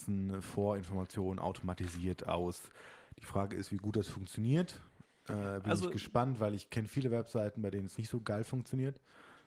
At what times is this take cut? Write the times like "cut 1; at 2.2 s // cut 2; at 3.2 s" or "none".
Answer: none